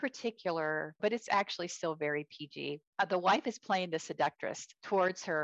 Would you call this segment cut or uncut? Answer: cut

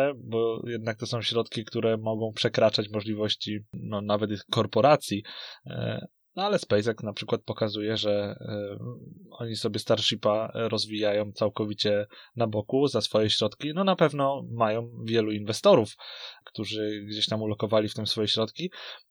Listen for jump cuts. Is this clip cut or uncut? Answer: uncut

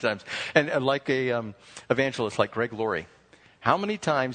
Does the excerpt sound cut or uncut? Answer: uncut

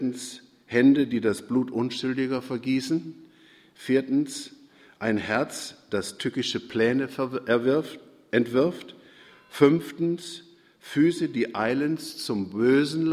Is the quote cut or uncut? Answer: uncut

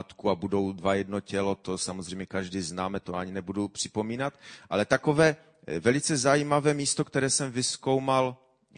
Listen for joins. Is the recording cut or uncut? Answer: uncut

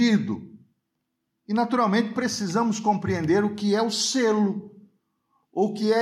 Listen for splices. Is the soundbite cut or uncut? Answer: cut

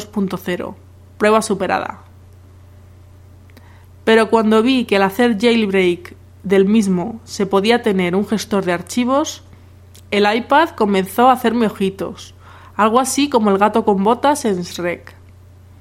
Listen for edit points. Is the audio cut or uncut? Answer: uncut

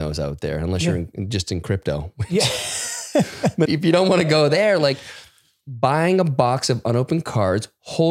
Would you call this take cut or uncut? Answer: cut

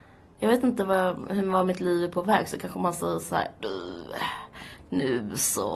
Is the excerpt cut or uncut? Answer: cut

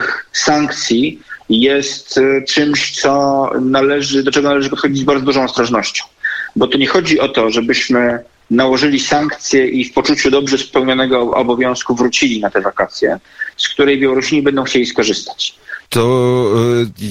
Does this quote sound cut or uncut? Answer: cut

